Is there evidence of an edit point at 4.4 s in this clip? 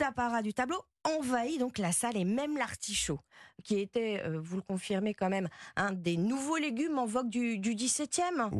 no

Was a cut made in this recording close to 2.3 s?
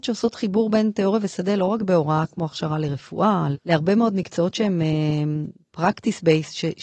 no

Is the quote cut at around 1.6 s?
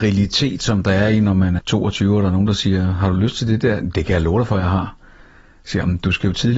yes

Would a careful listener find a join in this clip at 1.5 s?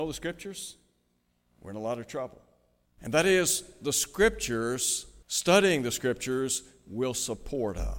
no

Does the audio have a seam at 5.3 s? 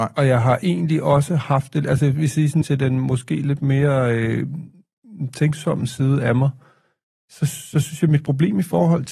no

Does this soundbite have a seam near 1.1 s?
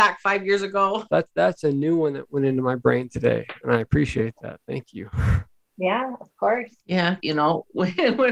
yes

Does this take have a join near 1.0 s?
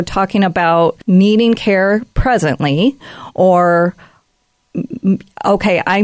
yes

